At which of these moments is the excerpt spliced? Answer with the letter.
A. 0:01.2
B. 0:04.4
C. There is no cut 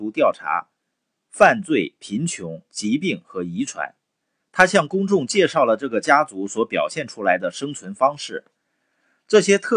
B